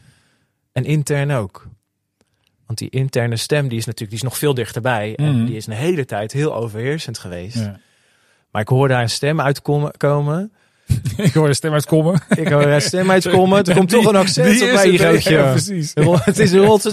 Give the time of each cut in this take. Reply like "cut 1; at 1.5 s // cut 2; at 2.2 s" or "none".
cut 1; at 8.4 s